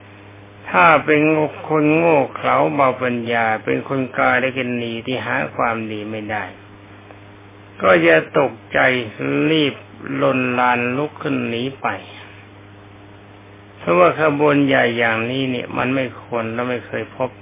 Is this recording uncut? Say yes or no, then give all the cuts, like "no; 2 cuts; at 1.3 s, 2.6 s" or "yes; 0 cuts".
yes; 0 cuts